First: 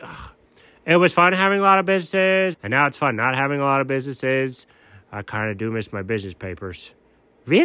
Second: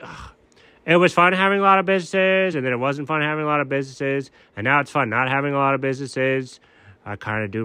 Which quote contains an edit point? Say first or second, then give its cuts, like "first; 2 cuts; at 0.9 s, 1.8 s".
first; 1 cut; at 2.5 s